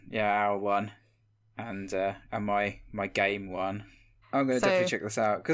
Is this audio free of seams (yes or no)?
no